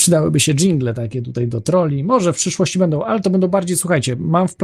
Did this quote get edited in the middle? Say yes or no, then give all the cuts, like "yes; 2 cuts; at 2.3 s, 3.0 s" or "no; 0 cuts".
no; 0 cuts